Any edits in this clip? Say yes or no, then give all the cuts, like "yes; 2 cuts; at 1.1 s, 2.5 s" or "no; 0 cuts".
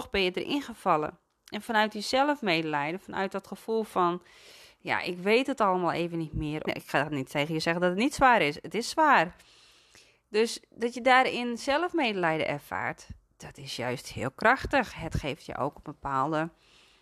yes; 1 cut; at 6.7 s